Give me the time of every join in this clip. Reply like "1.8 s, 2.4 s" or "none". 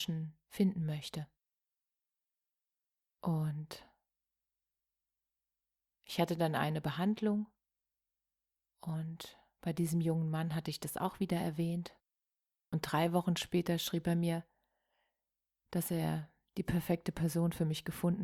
12.5 s